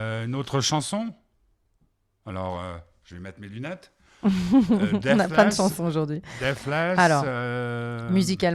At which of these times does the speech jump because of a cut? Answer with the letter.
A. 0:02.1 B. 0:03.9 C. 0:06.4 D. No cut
D